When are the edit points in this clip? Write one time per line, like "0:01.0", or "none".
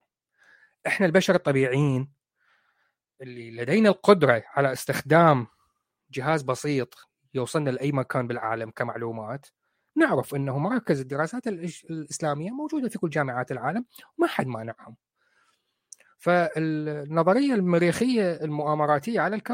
none